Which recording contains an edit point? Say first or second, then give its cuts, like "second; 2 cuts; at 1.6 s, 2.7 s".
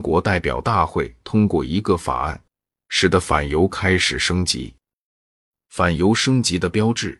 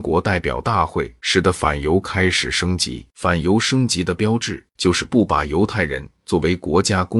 second; 2 cuts; at 1.2 s, 3.1 s